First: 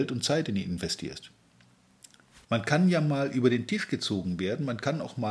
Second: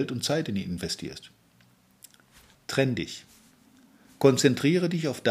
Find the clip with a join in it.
first; 1 cut; at 2.4 s

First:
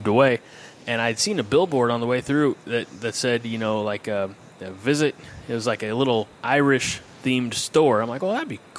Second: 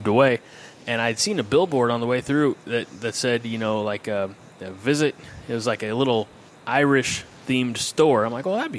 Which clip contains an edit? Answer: first; 1 cut; at 6.3 s

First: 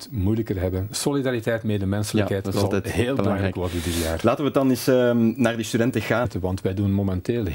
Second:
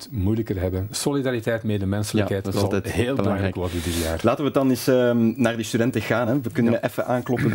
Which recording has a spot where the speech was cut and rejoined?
first; 1 cut; at 6.3 s

